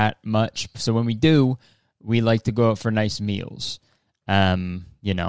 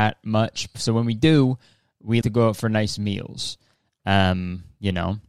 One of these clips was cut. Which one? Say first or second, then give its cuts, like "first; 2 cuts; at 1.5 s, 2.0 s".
second; 1 cut; at 2.2 s